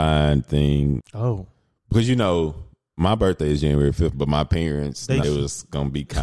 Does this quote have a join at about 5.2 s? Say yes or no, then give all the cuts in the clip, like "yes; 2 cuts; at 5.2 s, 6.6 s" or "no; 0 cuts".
yes; 3 cuts; at 1.0 s, 4.1 s, 5.2 s